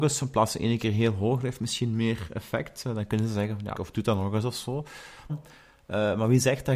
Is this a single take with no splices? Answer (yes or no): no